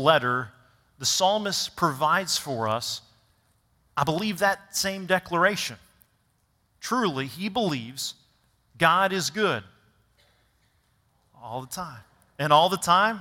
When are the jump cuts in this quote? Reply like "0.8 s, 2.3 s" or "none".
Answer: none